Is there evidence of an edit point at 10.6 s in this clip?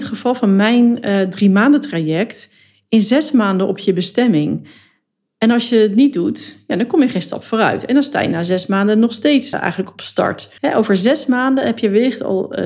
yes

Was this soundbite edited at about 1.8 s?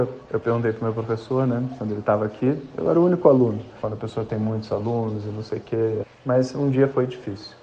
no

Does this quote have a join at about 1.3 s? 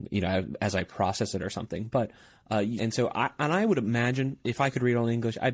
no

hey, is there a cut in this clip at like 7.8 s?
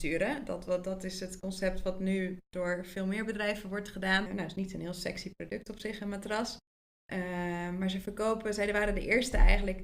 no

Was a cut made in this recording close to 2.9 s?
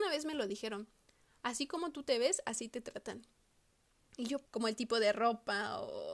no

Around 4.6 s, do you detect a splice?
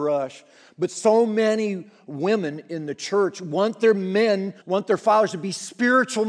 yes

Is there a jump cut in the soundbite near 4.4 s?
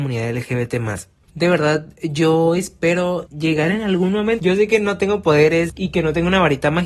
no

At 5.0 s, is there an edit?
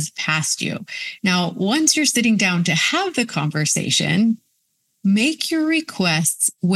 no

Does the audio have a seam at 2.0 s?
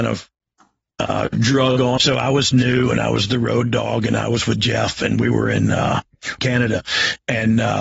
yes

